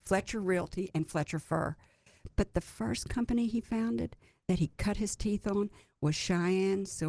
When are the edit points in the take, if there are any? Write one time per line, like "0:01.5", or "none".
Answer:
none